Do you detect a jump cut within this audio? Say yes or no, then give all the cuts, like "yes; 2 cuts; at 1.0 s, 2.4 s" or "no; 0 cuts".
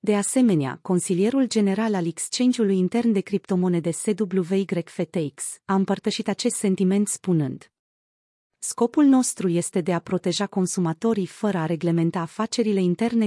yes; 1 cut; at 5.6 s